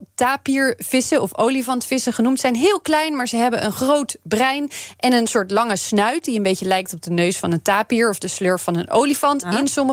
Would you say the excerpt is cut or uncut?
uncut